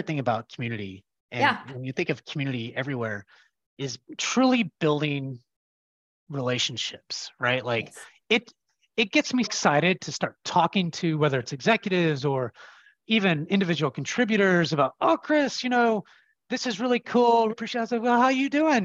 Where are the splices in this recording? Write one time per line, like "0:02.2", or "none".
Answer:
0:09.4
0:17.5